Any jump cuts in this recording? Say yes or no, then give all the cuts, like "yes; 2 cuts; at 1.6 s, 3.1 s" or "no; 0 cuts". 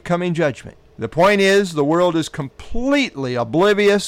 yes; 1 cut; at 0.9 s